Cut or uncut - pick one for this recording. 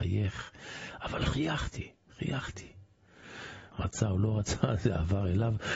cut